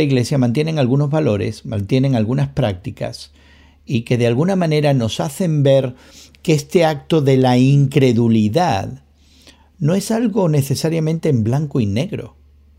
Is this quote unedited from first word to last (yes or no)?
yes